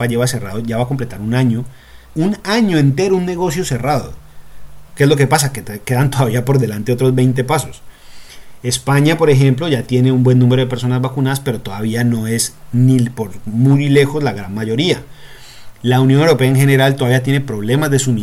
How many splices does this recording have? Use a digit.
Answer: 2